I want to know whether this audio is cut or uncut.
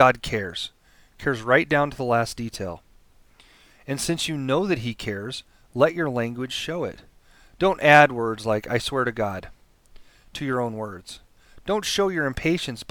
uncut